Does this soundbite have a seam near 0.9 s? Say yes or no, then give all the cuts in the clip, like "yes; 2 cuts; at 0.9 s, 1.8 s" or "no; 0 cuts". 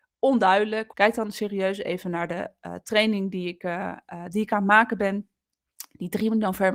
yes; 1 cut; at 0.9 s